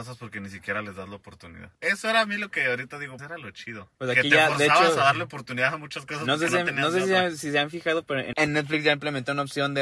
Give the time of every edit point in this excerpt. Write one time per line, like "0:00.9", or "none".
0:03.2